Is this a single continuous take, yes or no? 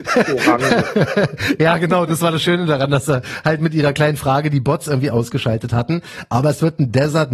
yes